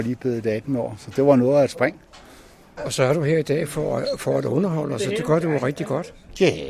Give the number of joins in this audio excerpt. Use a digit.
1